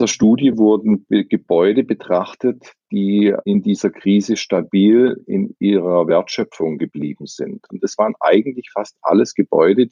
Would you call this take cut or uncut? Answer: cut